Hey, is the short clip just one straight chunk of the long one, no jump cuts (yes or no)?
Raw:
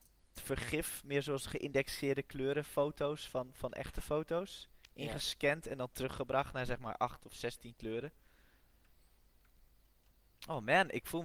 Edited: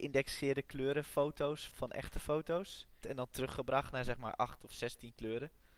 no